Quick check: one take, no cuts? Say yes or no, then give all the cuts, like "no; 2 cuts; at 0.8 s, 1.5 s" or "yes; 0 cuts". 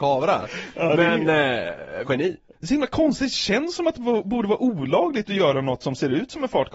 no; 1 cut; at 2.0 s